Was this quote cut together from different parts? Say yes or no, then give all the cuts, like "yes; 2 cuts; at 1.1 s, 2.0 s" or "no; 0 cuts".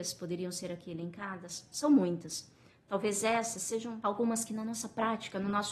no; 0 cuts